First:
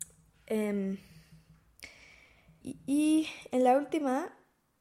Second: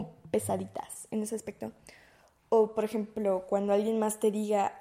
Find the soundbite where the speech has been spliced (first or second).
first